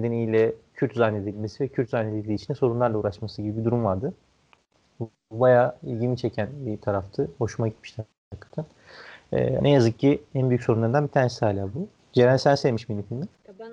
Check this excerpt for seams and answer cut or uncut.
cut